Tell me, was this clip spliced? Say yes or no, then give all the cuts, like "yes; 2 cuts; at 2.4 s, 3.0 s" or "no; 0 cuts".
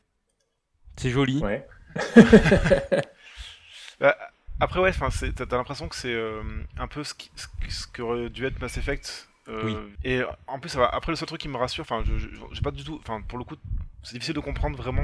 yes; 1 cut; at 10.0 s